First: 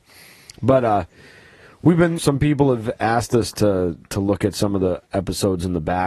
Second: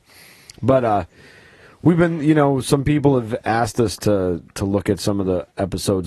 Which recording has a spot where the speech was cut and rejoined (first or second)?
first